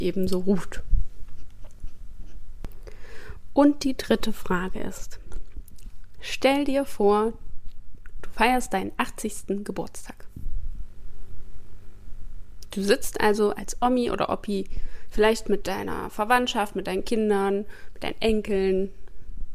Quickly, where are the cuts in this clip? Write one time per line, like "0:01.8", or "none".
none

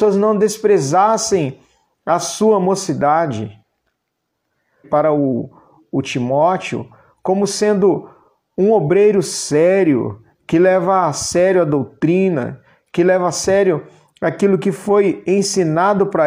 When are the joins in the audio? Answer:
0:04.8

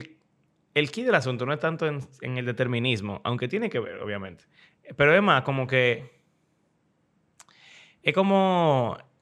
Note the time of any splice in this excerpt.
none

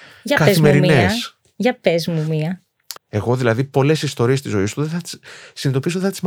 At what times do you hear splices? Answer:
0:03.0

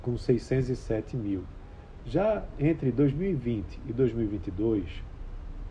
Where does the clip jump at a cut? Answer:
0:02.0

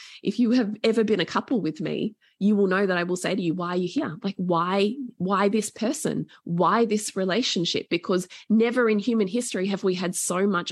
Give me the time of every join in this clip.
none

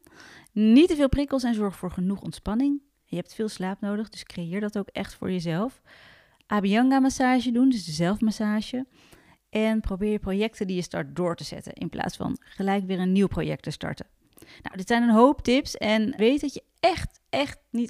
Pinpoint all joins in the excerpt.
0:16.2

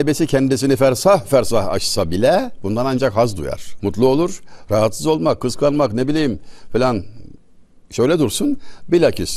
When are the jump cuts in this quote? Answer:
0:03.8

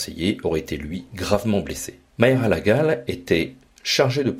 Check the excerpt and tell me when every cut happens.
0:02.1

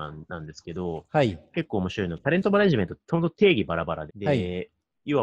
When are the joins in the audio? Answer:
0:04.1

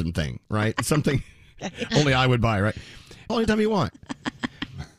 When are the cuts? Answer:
0:03.3

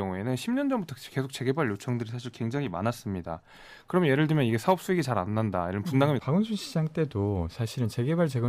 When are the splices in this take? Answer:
0:06.2

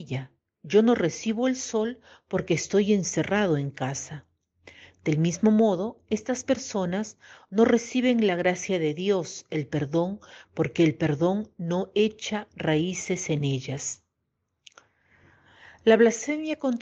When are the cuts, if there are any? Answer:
0:10.4

